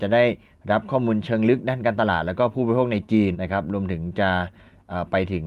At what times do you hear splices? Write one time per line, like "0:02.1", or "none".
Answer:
0:03.3